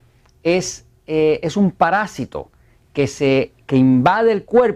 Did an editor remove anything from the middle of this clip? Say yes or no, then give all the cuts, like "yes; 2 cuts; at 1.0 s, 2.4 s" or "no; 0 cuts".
no; 0 cuts